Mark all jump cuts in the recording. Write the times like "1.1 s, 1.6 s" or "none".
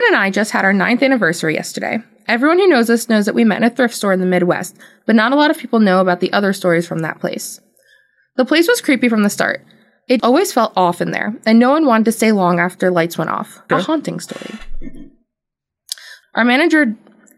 10.2 s, 13.7 s, 16.2 s